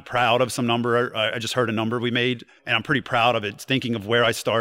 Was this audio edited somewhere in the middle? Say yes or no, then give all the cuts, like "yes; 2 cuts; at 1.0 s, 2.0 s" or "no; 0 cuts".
yes; 1 cut; at 2.6 s